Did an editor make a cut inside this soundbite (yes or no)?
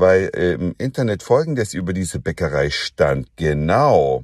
yes